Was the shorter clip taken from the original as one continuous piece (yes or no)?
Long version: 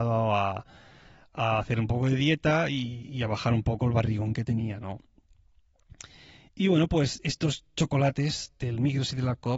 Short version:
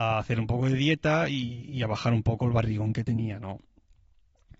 yes